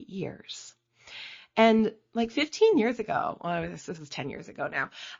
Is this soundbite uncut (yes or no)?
yes